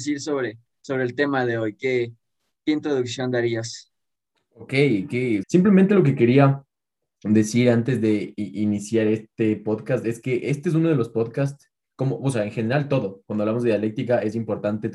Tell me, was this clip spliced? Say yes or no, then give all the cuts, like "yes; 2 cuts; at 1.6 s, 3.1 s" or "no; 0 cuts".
yes; 2 cuts; at 5.4 s, 13.2 s